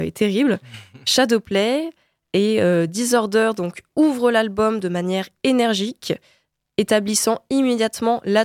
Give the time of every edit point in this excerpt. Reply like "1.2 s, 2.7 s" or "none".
none